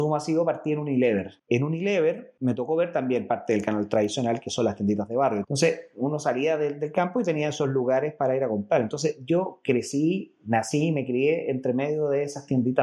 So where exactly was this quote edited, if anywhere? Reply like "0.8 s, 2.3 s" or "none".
5.4 s